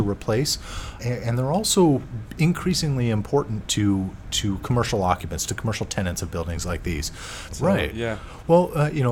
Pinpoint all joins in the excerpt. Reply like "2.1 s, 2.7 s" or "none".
1.0 s, 4.2 s, 7.5 s